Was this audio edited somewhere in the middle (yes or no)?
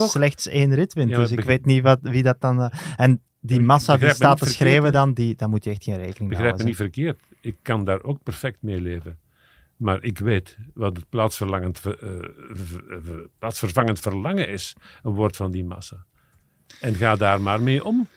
no